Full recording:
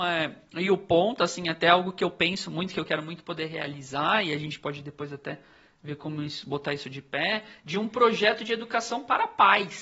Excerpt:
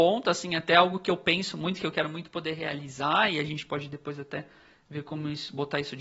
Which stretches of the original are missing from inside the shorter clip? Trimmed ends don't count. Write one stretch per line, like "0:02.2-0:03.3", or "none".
none